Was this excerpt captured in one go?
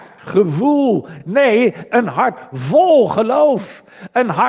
yes; 0 cuts

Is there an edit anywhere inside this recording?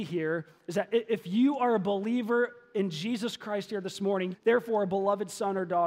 yes; 1 cut; at 4.3 s

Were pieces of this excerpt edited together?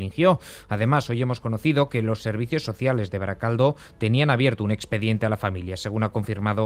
no; 0 cuts

